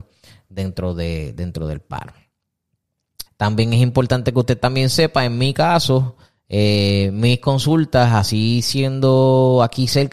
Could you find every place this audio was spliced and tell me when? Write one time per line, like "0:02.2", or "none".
0:03.3

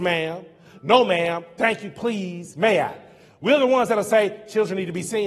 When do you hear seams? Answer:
none

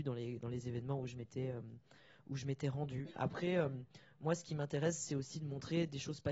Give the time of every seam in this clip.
none

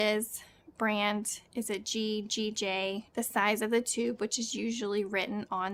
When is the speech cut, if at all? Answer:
0:03.1

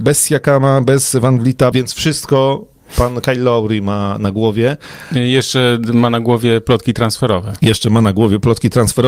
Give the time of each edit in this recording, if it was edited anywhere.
0:01.7

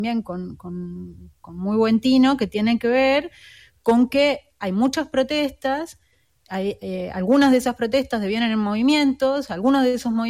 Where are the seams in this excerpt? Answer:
none

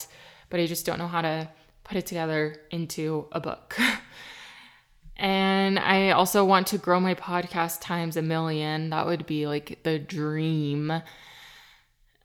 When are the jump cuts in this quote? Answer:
none

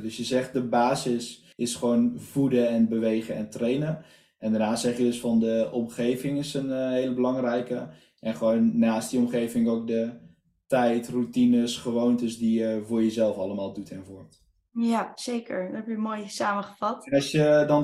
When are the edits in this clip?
0:01.5

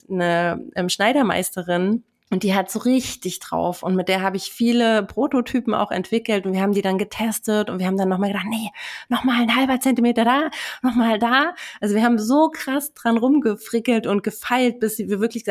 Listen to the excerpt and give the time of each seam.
none

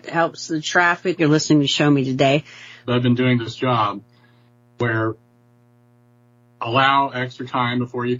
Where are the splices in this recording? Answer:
0:01.2
0:02.8

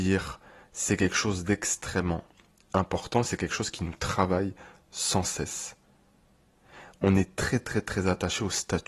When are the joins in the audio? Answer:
none

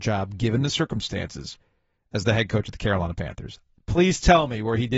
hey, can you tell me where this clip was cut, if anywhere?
none

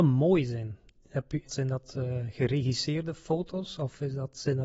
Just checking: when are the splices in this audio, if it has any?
0:01.4

